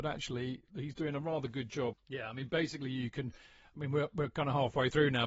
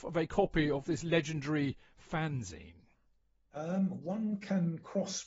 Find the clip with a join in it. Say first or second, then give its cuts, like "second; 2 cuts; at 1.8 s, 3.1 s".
first; 1 cut; at 1.9 s